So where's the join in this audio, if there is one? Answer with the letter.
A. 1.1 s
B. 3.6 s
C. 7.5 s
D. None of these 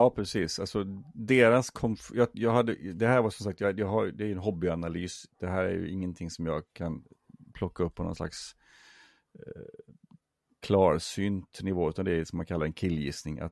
D